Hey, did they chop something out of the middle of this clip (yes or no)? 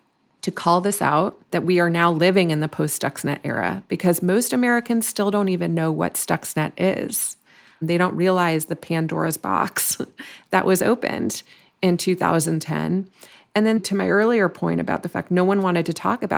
no